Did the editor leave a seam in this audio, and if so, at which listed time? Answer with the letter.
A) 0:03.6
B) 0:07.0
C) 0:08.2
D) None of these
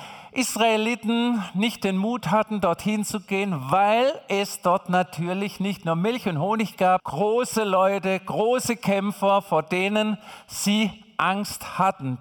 B